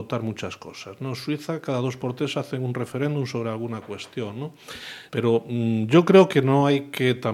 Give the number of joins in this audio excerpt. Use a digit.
1